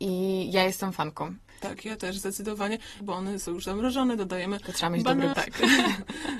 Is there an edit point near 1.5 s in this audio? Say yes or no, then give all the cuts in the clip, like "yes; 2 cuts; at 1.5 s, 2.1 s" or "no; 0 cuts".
no; 2 cuts; at 3.0 s, 5.3 s